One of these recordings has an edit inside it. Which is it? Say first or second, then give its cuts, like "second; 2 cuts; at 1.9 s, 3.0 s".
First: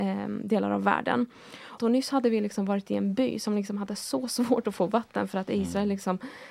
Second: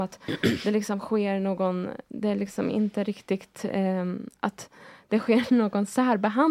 first; 1 cut; at 1.8 s